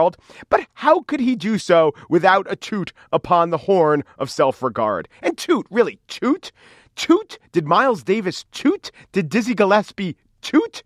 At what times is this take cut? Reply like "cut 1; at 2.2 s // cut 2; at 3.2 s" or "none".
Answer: none